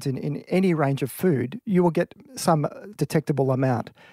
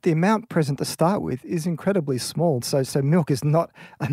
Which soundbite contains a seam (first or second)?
second